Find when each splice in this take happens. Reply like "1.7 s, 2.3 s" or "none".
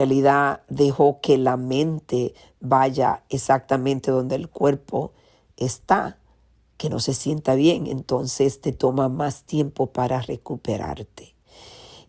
none